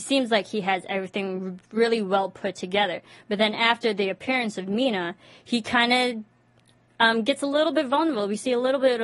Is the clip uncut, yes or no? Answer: yes